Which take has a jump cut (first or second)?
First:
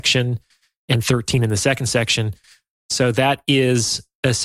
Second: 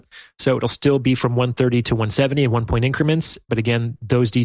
second